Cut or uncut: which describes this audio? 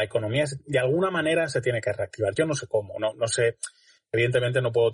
uncut